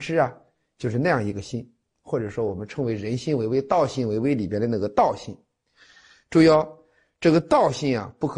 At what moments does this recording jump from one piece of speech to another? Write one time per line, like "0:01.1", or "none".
none